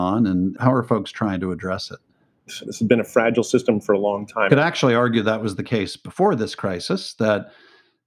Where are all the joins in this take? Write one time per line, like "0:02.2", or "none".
0:02.5
0:04.5

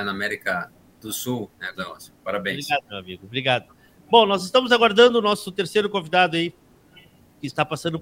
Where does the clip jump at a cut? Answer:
0:01.7

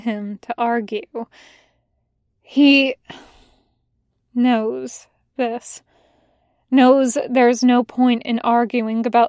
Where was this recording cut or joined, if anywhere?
none

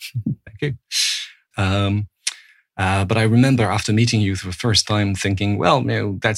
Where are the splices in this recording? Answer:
0:01.5

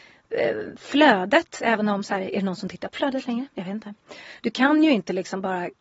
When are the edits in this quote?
0:04.4

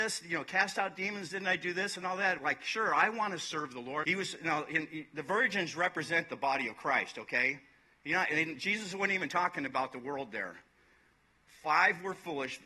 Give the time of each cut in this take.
0:02.4
0:04.0

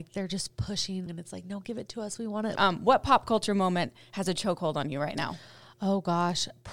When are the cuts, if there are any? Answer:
0:01.1
0:02.6

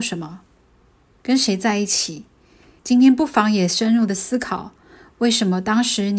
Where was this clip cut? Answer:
0:02.8

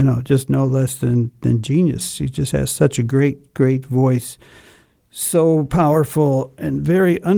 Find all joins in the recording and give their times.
none

